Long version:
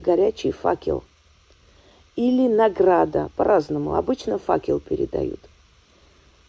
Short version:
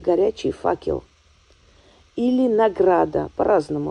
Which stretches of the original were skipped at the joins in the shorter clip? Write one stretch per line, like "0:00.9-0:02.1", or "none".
none